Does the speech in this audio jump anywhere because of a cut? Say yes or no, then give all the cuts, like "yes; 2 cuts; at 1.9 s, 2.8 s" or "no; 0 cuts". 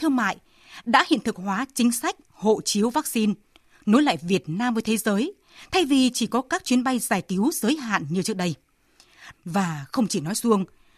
yes; 1 cut; at 9.3 s